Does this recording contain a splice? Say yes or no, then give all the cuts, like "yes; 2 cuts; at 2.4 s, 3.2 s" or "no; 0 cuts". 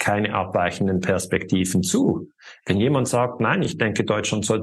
no; 0 cuts